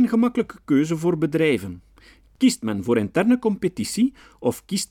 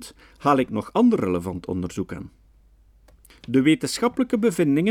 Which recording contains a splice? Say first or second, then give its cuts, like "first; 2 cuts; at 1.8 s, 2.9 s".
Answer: second; 1 cut; at 3.3 s